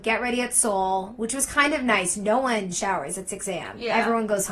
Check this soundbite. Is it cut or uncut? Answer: uncut